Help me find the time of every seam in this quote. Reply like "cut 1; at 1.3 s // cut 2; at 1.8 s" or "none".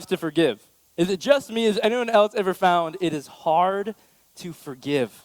none